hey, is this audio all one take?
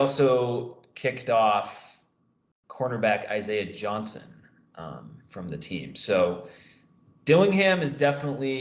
yes; 0 cuts

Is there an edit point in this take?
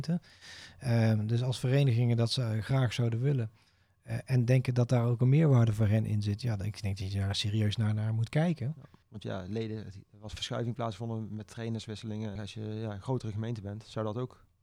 yes; 2 cuts; at 9.0 s, 12.4 s

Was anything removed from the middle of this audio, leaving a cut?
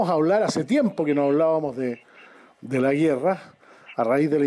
no; 0 cuts

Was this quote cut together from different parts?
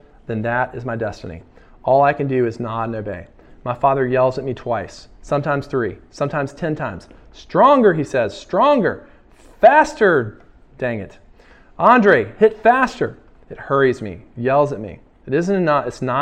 no; 0 cuts

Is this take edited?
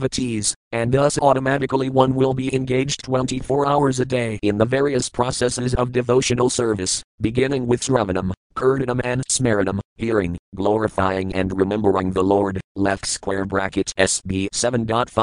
no; 0 cuts

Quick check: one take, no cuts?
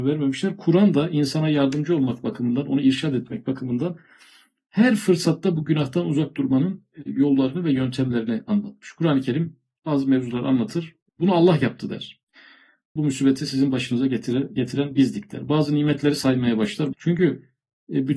no; 2 cuts; at 13.0 s, 16.9 s

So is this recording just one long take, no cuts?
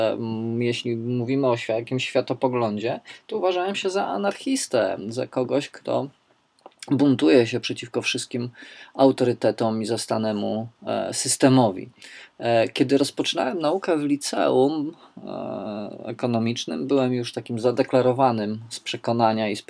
yes; 0 cuts

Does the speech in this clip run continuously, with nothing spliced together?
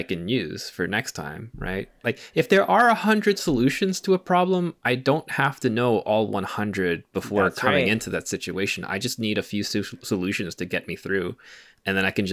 yes; 0 cuts

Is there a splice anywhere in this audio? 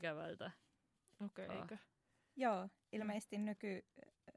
yes; 1 cut; at 1.5 s

